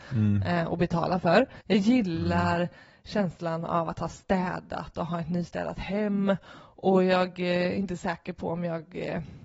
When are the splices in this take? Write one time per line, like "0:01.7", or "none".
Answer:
0:01.6